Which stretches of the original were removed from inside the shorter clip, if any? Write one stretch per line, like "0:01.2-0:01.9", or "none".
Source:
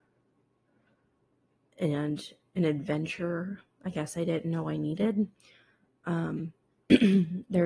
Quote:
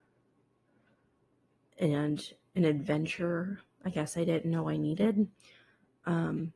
none